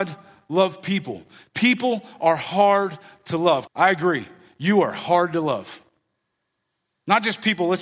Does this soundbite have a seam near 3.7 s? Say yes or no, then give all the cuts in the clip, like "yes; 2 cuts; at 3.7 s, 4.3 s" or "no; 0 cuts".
yes; 1 cut; at 3.7 s